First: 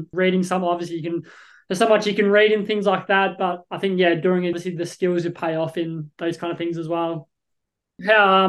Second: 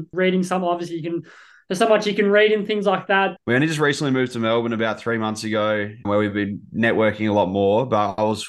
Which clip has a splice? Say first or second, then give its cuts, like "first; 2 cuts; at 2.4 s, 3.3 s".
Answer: second; 2 cuts; at 3.4 s, 6.0 s